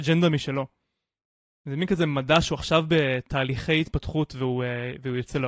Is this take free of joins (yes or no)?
yes